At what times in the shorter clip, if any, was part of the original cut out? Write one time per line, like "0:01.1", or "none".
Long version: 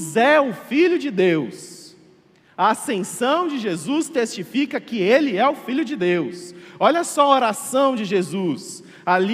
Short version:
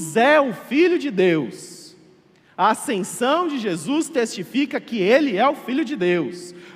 none